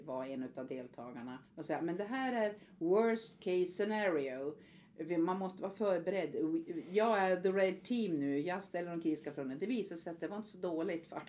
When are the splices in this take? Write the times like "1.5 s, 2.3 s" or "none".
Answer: 1.5 s